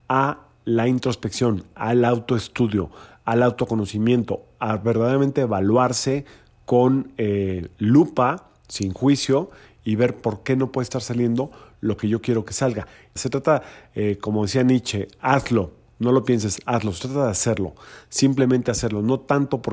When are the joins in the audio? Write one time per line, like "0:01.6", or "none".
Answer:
0:13.2